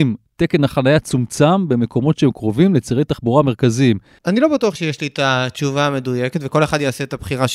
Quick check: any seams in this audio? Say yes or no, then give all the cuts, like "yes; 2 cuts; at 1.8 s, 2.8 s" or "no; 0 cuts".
yes; 1 cut; at 4.2 s